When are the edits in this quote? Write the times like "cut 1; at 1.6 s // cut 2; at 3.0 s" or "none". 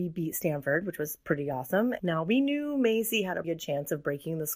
cut 1; at 2.0 s // cut 2; at 3.4 s